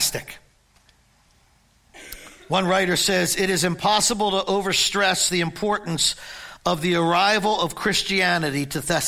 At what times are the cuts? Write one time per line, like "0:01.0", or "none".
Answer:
none